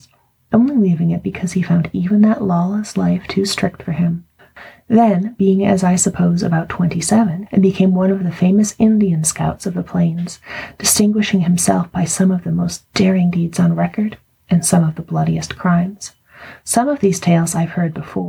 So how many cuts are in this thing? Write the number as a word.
one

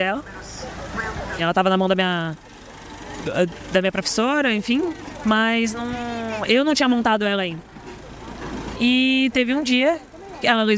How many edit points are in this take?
two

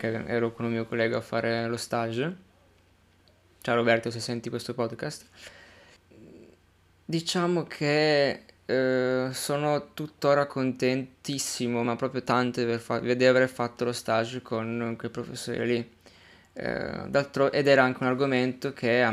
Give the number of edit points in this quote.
zero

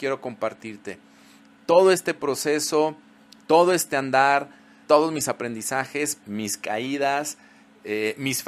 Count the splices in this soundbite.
two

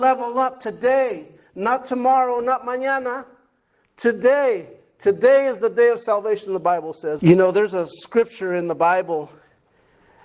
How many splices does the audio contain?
one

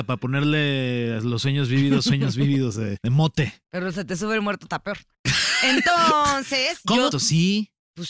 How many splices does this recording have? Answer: two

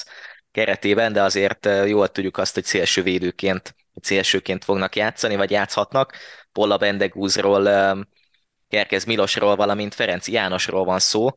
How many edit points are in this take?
zero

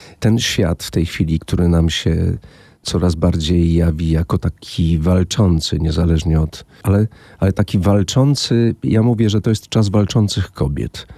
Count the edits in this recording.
one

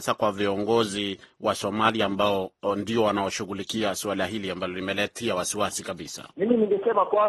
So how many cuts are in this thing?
one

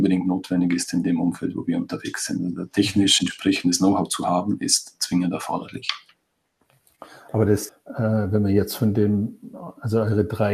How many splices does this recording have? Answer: one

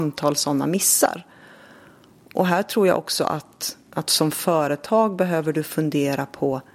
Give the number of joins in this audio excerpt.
zero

